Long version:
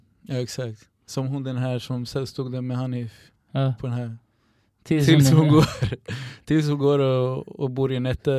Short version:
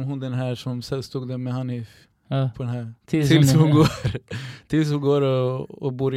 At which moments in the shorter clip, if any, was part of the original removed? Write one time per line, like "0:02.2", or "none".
0:03.0